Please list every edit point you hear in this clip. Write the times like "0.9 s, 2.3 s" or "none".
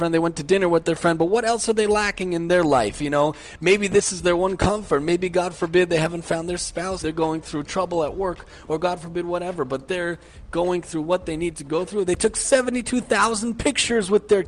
7.0 s, 12.1 s